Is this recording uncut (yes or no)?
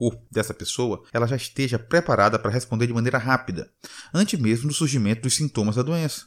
yes